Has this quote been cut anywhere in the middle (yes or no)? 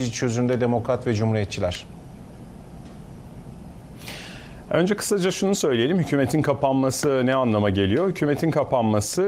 no